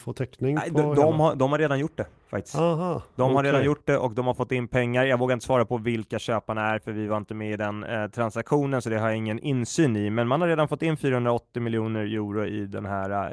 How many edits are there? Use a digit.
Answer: 0